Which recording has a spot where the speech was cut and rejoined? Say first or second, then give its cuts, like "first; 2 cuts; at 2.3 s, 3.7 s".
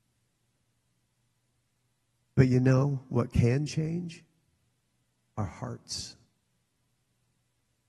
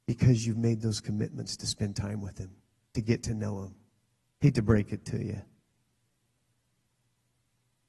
second; 1 cut; at 4.3 s